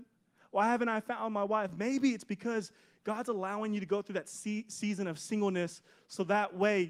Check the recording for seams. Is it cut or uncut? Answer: uncut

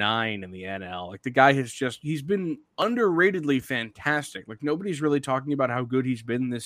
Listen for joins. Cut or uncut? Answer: uncut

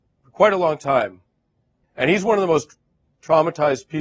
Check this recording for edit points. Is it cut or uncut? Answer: cut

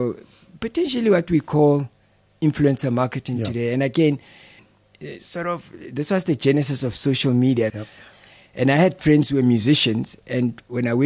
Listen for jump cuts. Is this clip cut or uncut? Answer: cut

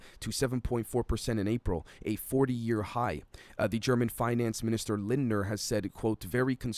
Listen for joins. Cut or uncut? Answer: uncut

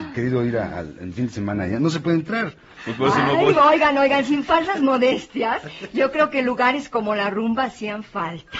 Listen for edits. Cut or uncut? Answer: uncut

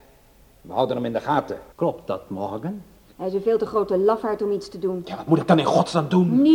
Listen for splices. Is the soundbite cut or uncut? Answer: cut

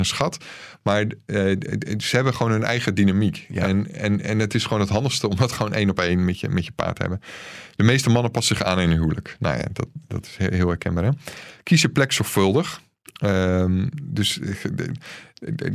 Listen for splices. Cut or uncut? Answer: uncut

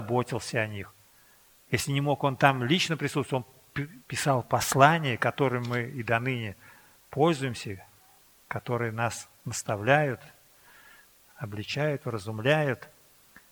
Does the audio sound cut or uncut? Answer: uncut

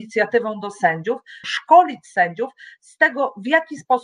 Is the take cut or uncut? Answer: cut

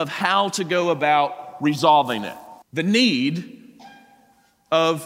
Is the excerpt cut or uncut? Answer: cut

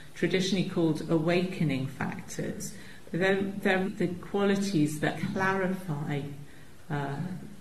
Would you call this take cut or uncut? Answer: cut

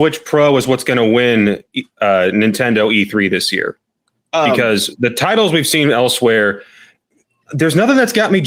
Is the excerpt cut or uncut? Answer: uncut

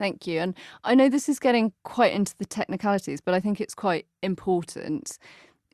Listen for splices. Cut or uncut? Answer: uncut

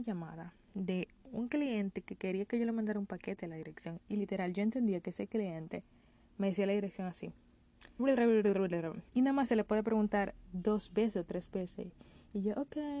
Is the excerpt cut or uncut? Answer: cut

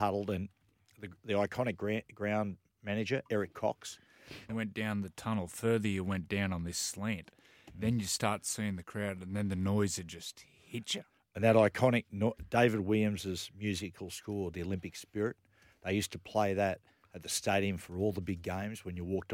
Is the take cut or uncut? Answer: cut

